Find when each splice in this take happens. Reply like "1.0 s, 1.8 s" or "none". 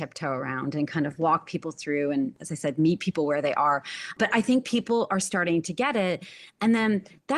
none